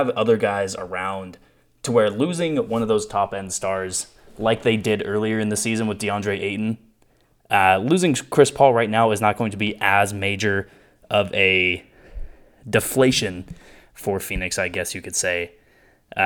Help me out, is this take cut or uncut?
uncut